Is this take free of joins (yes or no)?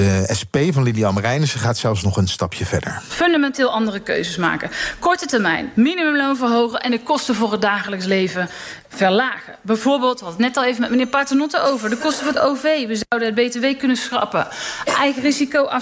yes